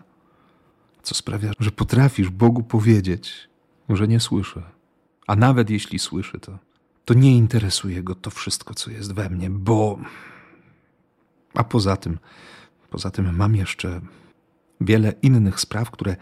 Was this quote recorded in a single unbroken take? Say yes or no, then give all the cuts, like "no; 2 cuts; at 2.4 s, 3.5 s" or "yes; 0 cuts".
no; 1 cut; at 1.5 s